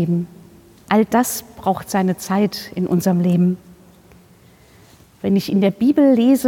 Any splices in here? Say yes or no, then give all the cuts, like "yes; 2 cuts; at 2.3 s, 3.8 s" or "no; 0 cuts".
no; 0 cuts